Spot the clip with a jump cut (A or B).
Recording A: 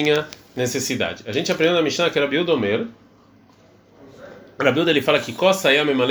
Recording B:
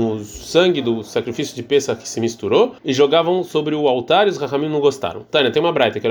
B